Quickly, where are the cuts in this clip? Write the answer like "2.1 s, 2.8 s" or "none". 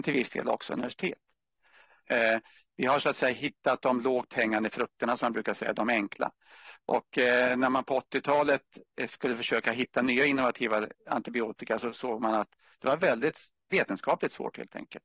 2.0 s